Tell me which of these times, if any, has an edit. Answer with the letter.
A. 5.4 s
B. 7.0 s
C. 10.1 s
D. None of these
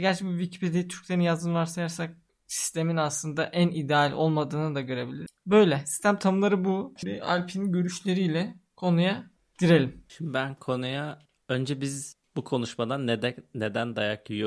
B